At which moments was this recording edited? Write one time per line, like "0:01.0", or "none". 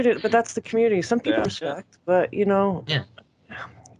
0:01.5

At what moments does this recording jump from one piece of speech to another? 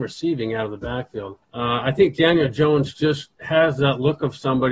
0:01.4
0:03.3

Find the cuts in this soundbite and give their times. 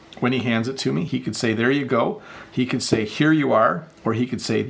none

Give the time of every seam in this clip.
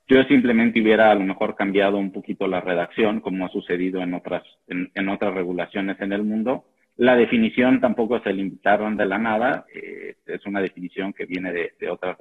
0:09.7

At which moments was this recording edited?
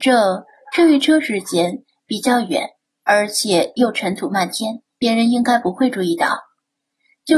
0:04.9

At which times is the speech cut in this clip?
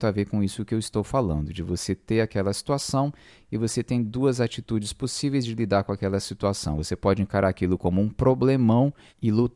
none

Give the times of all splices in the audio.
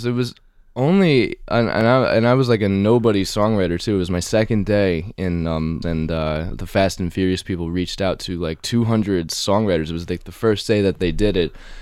0:05.8

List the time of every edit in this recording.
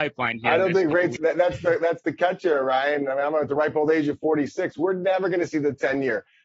0:01.2

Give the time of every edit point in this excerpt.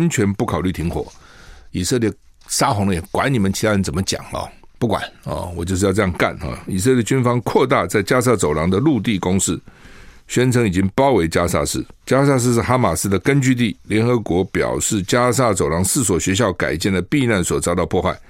none

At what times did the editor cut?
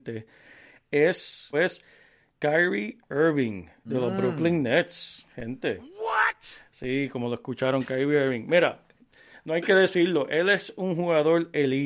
0:01.5

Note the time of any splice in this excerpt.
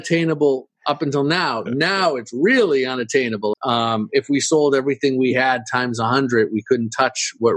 0:03.5

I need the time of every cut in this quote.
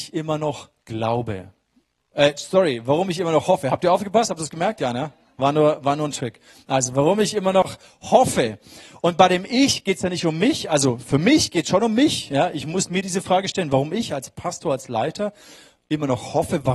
none

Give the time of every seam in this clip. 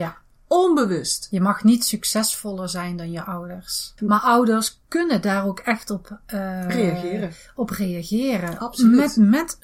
0:04.0

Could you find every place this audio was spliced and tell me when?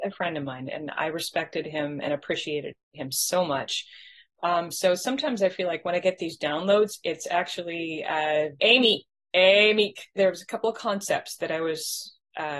0:08.6
0:10.2

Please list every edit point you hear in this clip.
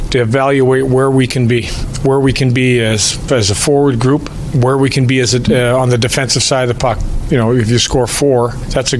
0:03.3
0:07.3

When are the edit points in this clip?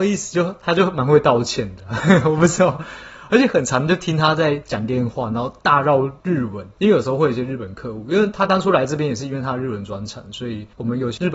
none

